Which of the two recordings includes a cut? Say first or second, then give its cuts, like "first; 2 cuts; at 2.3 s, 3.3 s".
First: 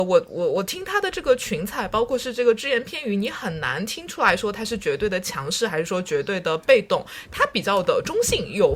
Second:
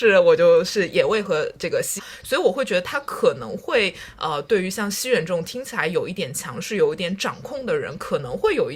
second; 1 cut; at 2.0 s